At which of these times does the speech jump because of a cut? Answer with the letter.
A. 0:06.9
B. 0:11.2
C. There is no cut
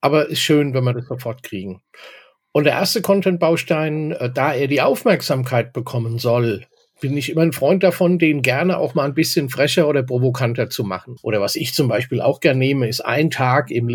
B